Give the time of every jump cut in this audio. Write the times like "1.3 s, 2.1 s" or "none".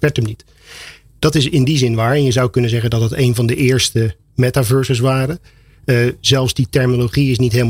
none